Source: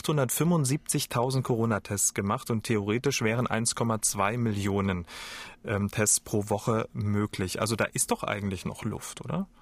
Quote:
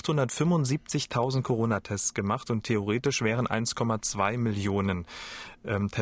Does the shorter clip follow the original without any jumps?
yes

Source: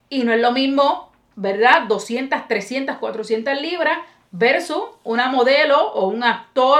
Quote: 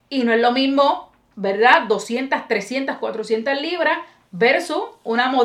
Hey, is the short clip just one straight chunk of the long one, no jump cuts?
yes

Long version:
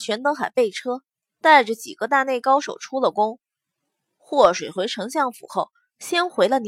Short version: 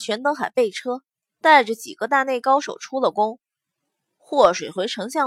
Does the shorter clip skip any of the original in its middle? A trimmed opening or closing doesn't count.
no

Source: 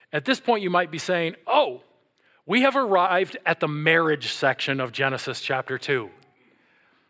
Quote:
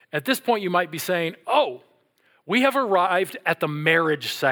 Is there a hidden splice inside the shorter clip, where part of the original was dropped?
no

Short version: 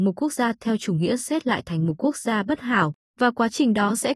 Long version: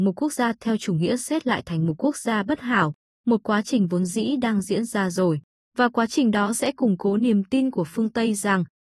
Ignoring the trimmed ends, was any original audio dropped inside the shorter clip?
yes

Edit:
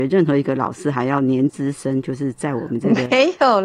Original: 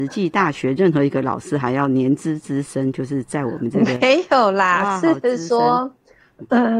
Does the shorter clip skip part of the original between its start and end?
yes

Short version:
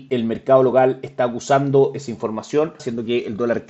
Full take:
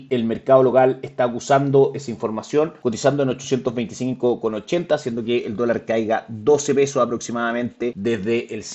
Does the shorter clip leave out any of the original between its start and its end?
yes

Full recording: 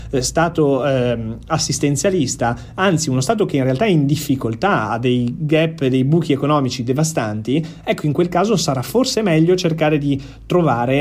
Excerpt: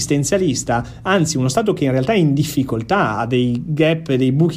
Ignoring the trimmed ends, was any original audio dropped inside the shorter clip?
no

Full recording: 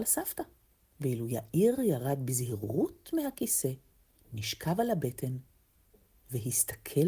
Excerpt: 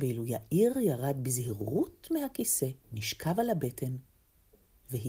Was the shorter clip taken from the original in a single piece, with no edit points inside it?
no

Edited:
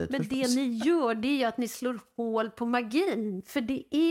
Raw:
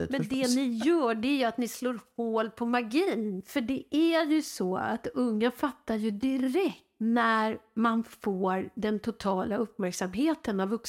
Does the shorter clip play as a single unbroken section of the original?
yes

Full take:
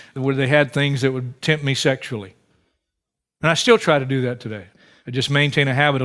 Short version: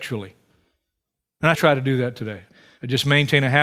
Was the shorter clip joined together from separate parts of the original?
yes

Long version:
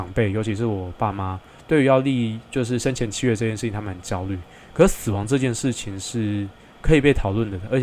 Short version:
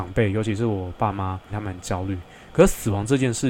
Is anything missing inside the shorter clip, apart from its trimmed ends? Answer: yes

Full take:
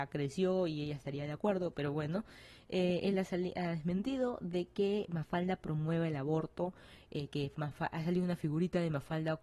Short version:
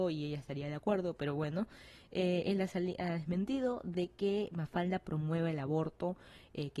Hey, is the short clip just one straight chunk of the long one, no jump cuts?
yes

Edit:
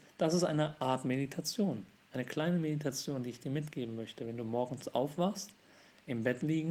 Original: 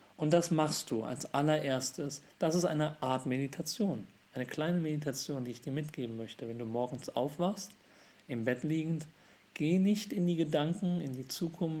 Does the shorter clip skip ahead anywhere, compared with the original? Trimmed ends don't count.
no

